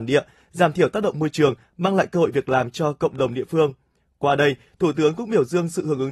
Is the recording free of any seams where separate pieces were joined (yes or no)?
yes